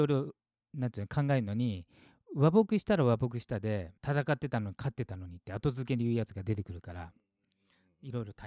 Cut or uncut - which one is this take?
cut